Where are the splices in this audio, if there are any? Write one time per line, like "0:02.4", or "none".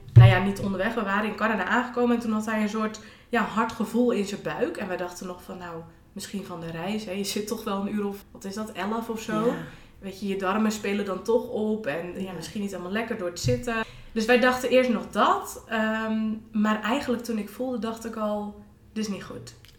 0:08.2
0:13.8